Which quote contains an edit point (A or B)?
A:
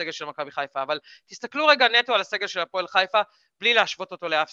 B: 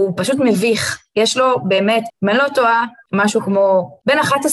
B